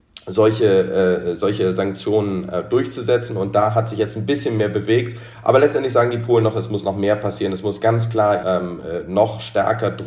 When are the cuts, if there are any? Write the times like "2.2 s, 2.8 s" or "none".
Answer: 8.4 s